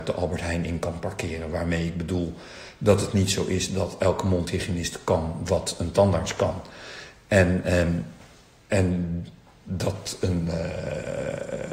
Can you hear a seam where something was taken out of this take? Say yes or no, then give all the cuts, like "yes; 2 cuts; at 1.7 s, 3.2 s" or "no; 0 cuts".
no; 0 cuts